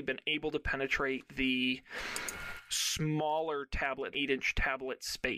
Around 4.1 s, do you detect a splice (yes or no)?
yes